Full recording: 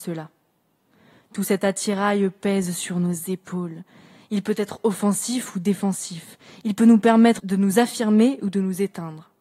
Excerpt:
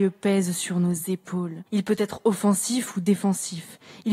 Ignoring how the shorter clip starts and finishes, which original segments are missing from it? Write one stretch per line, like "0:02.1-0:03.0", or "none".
0:03.9-0:04.3